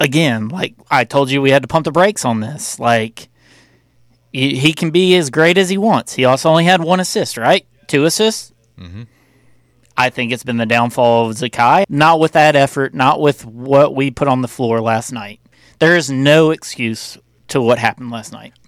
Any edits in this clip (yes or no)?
yes